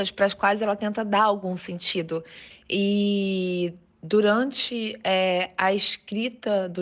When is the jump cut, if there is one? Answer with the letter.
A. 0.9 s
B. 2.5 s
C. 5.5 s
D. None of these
B